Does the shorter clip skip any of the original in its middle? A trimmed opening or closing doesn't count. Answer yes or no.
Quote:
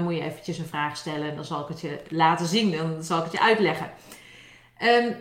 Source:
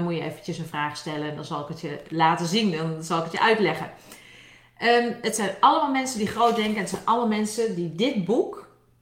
no